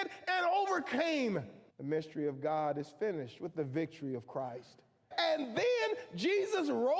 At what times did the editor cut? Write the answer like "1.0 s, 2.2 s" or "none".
1.7 s, 5.1 s